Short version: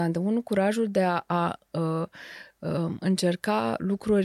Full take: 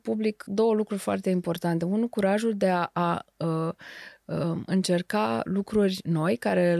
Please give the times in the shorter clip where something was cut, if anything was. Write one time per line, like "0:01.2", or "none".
none